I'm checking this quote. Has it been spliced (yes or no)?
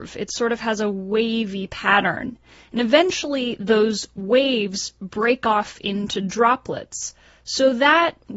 no